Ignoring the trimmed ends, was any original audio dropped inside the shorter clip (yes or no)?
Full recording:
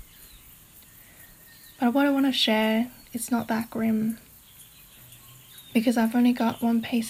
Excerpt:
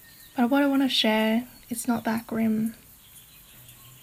no